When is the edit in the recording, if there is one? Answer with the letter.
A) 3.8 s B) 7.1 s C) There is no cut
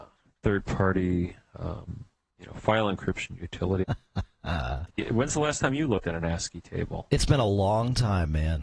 A